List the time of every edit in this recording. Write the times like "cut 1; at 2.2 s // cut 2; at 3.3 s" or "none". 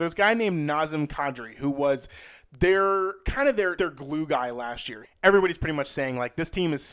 cut 1; at 3.8 s // cut 2; at 5.0 s